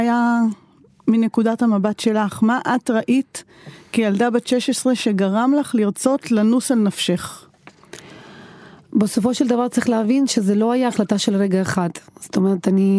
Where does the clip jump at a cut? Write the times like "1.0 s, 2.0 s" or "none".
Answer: none